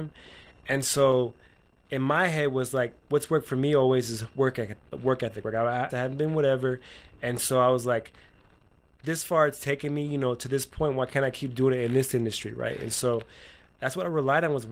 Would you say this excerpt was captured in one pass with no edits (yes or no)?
no